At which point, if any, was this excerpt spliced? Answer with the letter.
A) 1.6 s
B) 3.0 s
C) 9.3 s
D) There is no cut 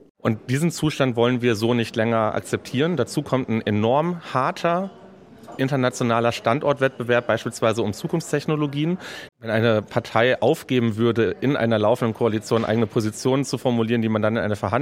C